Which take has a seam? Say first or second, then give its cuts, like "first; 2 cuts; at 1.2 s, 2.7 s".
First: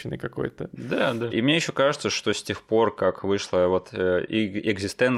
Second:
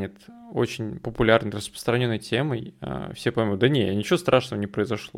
first; 1 cut; at 1.3 s